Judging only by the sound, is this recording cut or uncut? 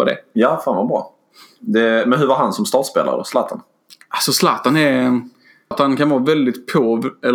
cut